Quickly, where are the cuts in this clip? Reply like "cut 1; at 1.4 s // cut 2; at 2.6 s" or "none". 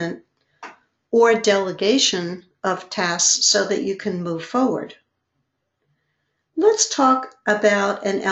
none